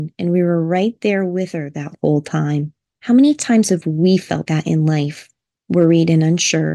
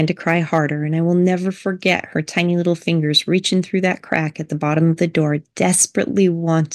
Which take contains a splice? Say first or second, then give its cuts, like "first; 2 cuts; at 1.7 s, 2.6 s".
first; 1 cut; at 4.4 s